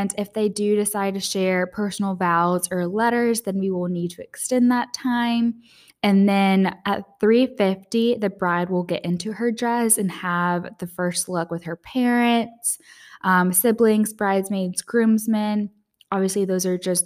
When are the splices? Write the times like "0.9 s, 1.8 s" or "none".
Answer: 5.9 s

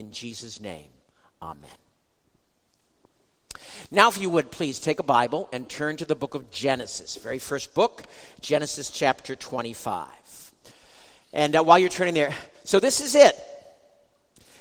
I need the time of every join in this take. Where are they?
none

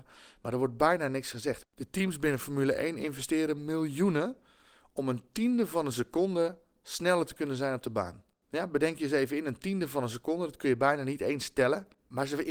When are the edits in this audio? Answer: 1.6 s

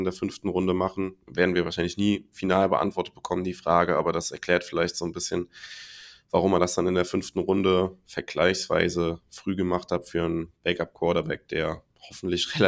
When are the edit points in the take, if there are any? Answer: 1.2 s

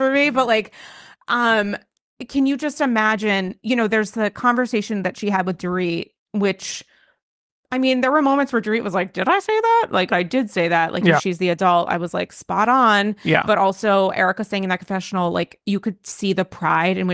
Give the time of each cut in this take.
10.1 s, 11.2 s

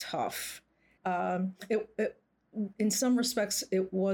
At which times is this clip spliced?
1.0 s

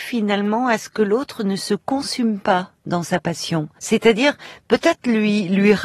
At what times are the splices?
3.8 s

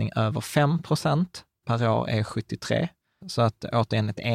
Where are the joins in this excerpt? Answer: 1.6 s, 3.2 s

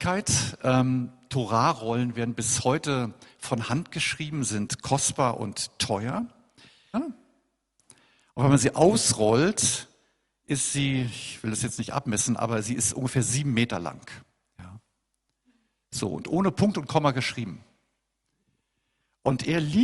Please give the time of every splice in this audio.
6.9 s

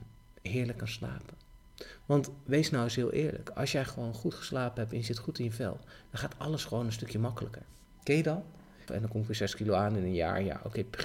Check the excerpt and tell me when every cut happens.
8.9 s

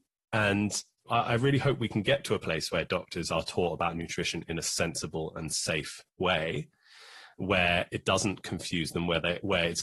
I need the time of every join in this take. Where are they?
1.1 s

